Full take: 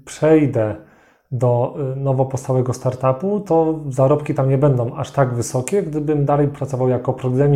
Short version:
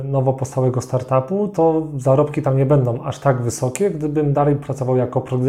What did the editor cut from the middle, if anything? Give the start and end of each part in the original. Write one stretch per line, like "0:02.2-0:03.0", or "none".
none